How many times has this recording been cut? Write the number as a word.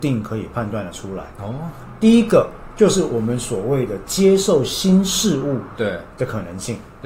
one